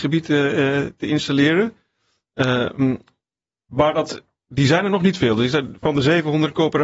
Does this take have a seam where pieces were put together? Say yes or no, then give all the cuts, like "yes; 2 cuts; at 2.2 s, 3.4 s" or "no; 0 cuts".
no; 0 cuts